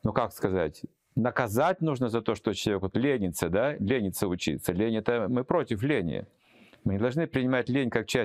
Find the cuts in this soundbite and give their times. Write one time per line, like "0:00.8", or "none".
none